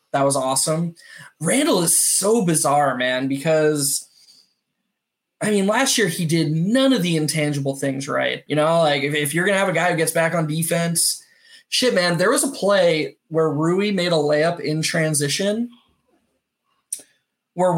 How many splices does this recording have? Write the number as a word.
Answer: one